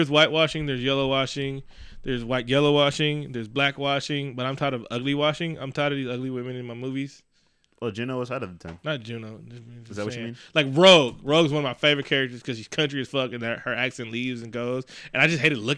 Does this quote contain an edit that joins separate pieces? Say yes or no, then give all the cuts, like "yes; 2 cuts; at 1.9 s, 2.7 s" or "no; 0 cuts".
no; 0 cuts